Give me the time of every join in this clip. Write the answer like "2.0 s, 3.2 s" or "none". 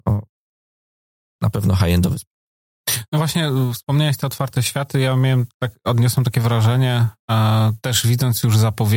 none